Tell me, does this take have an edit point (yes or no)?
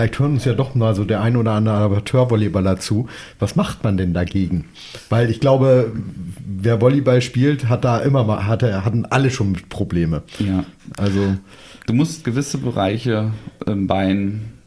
no